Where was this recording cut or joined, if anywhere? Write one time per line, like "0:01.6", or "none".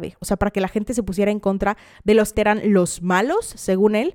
0:02.3